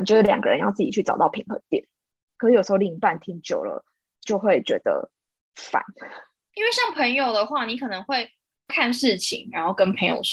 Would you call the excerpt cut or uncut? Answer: cut